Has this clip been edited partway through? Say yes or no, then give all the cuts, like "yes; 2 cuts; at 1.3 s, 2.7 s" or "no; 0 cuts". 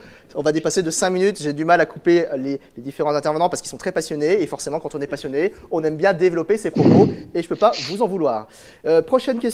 no; 0 cuts